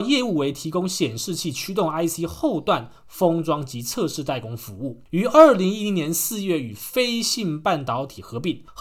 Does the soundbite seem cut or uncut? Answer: uncut